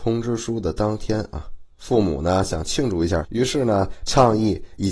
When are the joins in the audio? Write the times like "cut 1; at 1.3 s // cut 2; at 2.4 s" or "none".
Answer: cut 1; at 3.2 s

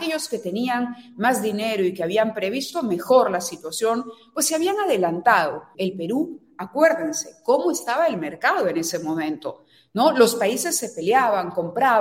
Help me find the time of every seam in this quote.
cut 1; at 5.7 s

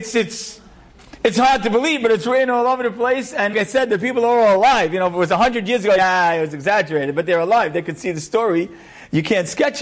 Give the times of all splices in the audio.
cut 1; at 3.5 s // cut 2; at 6.0 s

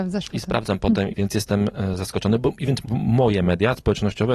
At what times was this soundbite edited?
cut 1; at 1.1 s // cut 2; at 2.8 s

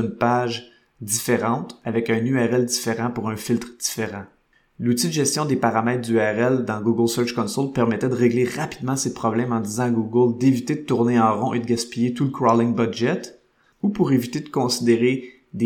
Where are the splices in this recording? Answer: none

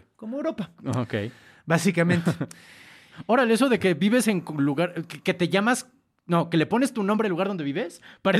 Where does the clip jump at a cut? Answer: none

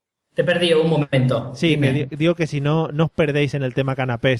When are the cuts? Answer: none

